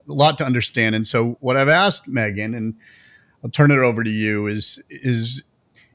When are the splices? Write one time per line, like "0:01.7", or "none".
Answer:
none